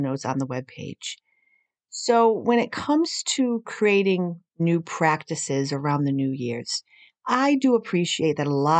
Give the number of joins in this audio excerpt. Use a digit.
1